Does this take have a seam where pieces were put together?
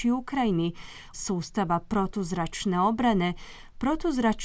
yes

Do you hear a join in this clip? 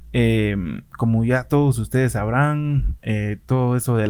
no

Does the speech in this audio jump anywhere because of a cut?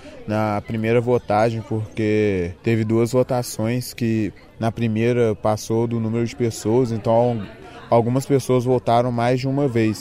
yes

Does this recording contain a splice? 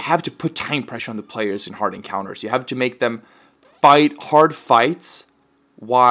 no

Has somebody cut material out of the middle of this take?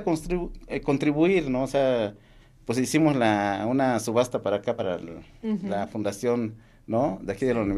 no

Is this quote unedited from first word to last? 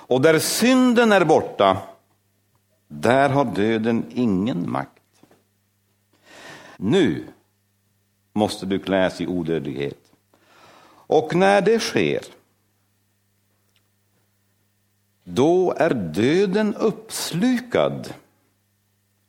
no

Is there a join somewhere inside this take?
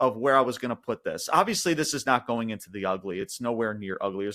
no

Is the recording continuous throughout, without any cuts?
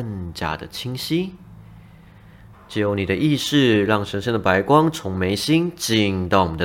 no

